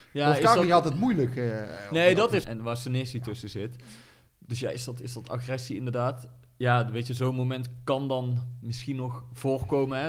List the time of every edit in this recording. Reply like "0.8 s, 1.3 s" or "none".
2.4 s